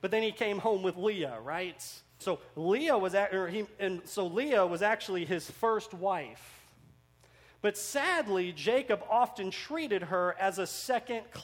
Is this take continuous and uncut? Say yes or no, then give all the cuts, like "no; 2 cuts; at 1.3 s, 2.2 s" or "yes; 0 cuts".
no; 1 cut; at 2.2 s